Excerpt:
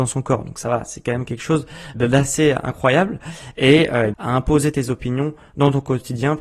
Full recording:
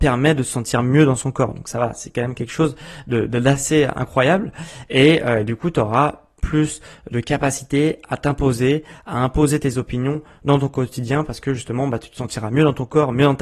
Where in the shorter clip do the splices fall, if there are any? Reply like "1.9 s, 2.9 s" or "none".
1.9 s, 4.1 s